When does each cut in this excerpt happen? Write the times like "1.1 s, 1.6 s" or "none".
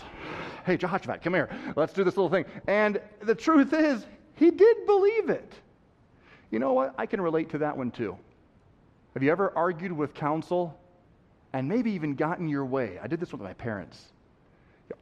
2.6 s, 9.1 s